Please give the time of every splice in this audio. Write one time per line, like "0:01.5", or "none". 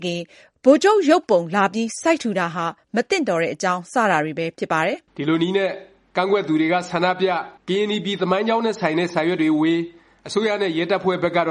0:05.1
0:07.6